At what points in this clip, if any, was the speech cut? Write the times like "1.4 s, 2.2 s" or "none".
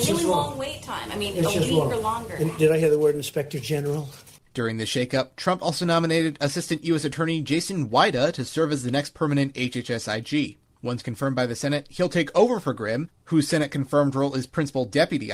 4.4 s

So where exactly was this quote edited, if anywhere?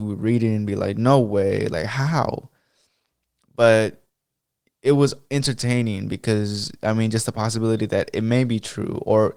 none

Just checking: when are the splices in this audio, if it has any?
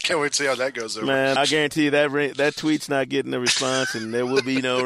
1.4 s

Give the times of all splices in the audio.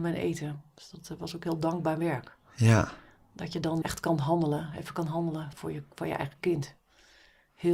3.8 s, 5.5 s

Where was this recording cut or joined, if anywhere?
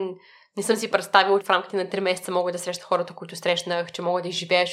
1.4 s

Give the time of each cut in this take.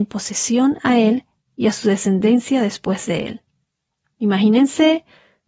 4.0 s

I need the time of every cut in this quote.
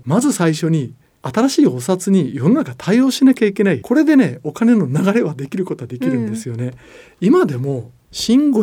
3.8 s

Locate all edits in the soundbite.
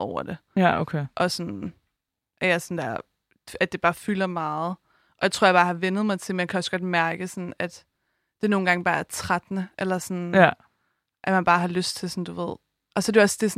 none

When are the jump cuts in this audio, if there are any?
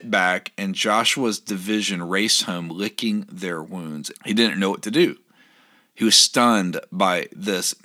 4.1 s

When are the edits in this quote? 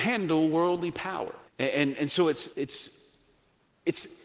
1.5 s, 2.5 s

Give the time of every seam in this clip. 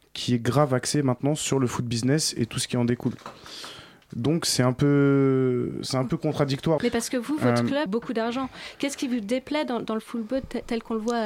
6.8 s, 7.9 s

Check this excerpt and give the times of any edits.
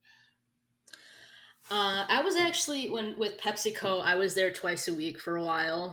none

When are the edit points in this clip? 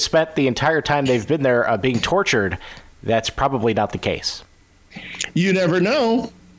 none

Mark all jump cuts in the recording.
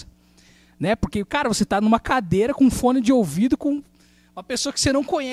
none

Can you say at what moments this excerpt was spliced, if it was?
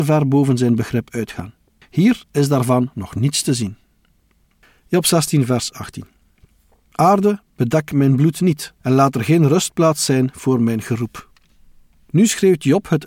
2.2 s

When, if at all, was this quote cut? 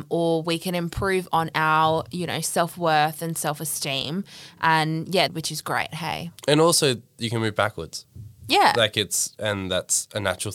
5.3 s

